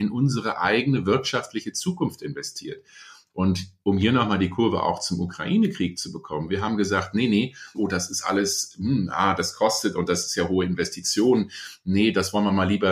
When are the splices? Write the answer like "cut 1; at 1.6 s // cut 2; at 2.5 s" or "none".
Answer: cut 1; at 7.7 s